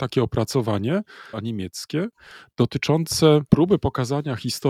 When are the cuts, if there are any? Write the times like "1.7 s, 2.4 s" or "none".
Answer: 1.3 s